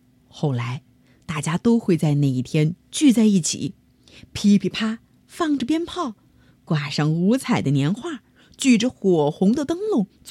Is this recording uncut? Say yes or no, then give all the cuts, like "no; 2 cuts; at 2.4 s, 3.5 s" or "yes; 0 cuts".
no; 1 cut; at 4.7 s